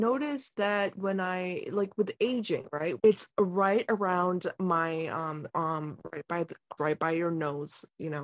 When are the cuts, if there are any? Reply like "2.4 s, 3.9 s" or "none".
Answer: 3.0 s, 5.5 s, 6.8 s